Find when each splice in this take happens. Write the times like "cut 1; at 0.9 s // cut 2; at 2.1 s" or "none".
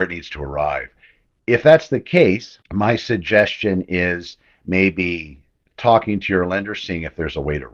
cut 1; at 2.6 s